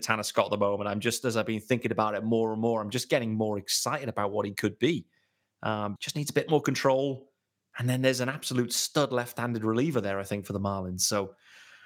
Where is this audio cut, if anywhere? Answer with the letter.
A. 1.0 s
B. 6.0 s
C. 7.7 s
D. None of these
B